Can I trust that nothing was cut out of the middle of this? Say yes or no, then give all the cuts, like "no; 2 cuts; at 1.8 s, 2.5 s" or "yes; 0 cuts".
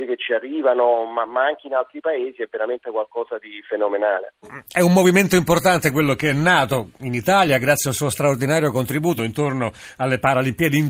no; 2 cuts; at 4.4 s, 9.2 s